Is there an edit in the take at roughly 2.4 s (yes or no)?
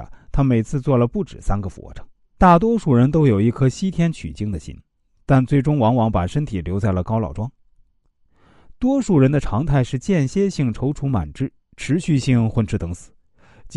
yes